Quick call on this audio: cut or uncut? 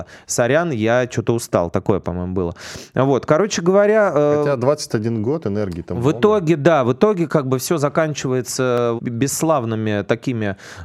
cut